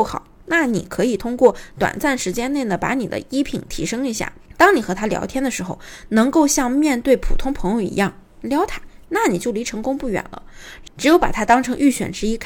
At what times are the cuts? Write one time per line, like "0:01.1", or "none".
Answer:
0:04.6